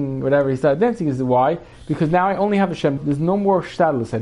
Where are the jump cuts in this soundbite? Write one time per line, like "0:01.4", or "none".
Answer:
0:03.0